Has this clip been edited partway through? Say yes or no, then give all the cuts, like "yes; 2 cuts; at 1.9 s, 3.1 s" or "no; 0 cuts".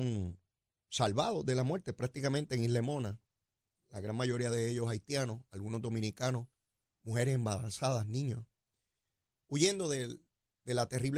no; 0 cuts